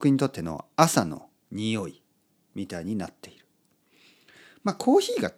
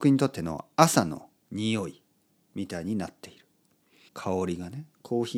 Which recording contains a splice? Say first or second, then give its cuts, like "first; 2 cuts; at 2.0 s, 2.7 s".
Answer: second; 1 cut; at 4.1 s